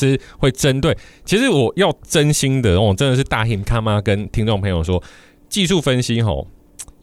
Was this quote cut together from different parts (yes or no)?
no